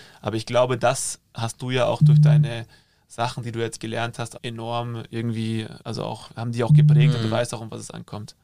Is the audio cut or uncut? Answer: cut